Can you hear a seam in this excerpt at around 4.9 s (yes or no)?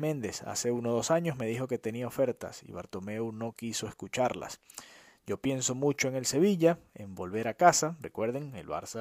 no